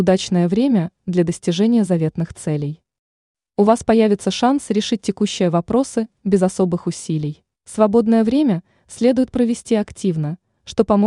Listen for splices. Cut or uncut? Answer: cut